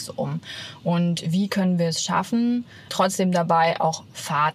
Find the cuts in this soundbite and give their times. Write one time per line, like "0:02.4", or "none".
0:02.9